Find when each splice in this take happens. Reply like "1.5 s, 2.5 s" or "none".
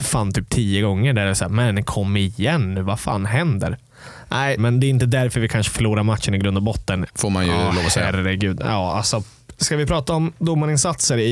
4.6 s, 7.1 s